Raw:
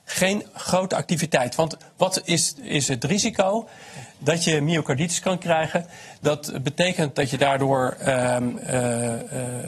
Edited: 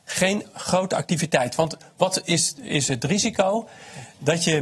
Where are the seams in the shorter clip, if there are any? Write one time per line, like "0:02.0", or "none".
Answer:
none